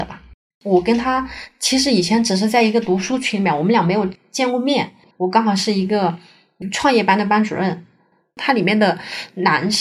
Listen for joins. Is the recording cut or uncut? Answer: cut